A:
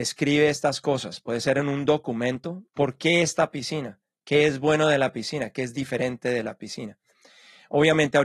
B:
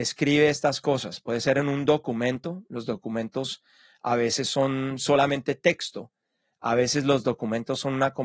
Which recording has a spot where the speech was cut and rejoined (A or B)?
A